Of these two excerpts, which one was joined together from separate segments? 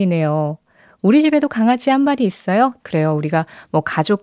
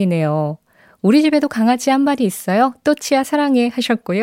first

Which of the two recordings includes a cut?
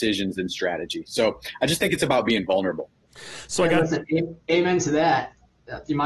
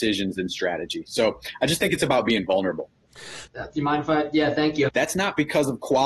second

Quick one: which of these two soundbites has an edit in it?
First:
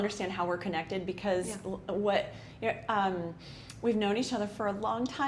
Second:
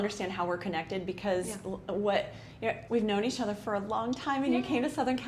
second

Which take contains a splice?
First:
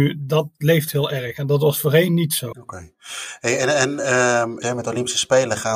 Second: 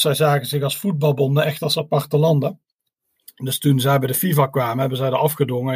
first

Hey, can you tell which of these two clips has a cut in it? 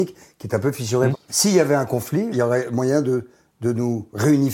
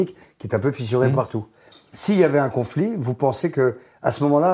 first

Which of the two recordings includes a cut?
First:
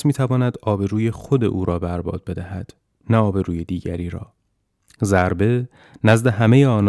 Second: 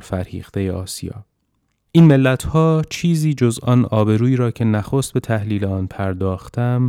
second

